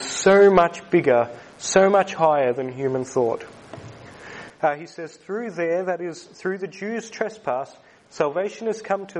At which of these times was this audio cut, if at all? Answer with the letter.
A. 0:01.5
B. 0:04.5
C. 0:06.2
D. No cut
B